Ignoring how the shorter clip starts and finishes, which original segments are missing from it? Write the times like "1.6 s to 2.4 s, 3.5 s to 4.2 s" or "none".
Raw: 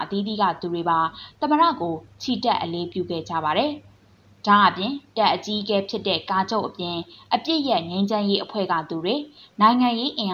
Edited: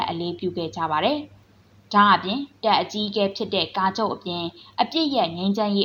none